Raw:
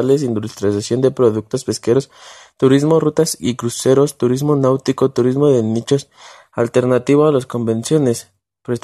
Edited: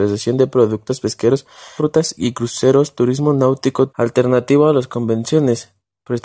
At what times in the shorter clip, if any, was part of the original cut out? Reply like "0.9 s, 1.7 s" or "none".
1.8 s, 3.9 s